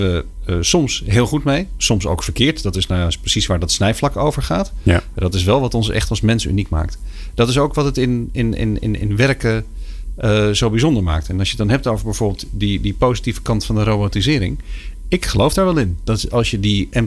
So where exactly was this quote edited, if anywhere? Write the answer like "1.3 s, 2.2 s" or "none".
none